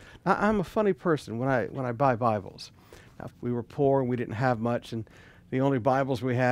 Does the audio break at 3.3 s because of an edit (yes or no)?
yes